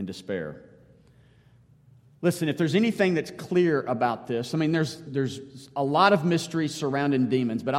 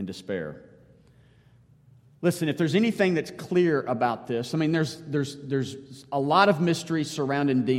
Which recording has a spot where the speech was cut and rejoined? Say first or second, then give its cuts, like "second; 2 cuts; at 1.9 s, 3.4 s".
first; 1 cut; at 5.0 s